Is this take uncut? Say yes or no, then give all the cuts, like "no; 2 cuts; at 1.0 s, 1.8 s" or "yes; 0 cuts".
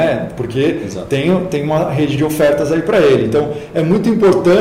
yes; 0 cuts